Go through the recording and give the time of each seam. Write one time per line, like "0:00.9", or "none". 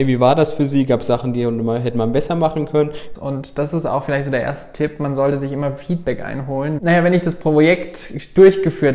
0:03.1
0:06.8

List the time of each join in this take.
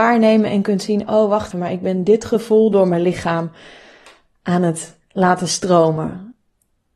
0:01.5

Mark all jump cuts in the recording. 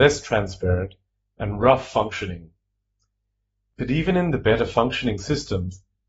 none

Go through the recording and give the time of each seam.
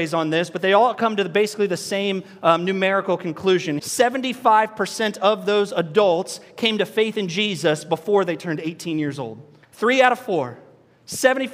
0:03.8
0:09.6

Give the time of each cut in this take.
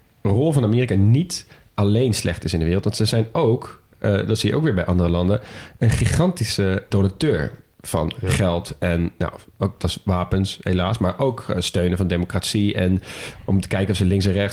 0:06.9

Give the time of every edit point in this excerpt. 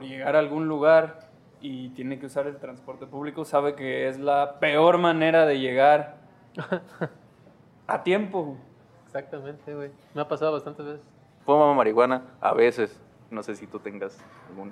0:11.4
0:13.3

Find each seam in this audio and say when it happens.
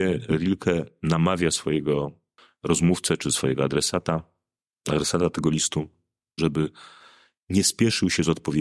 0:06.4

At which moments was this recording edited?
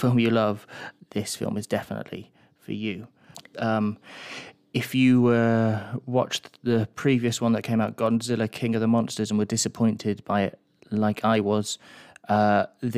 0:01.0
0:03.5

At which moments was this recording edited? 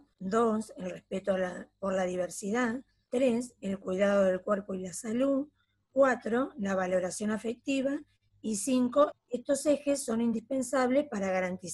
0:09.1

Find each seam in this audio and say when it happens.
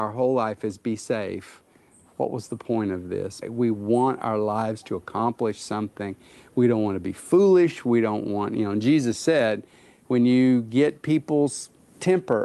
0:03.4

